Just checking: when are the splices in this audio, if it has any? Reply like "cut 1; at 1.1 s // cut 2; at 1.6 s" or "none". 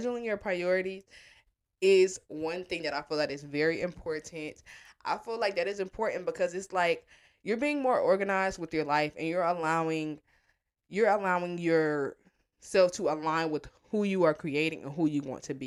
none